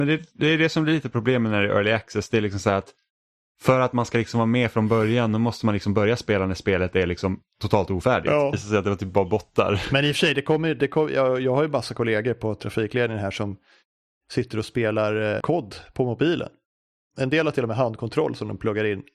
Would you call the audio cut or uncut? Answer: cut